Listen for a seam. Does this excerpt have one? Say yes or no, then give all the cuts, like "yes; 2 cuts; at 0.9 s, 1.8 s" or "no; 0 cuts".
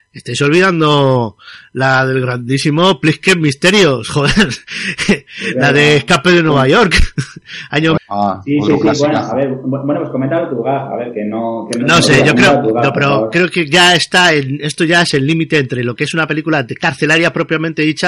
yes; 1 cut; at 8.0 s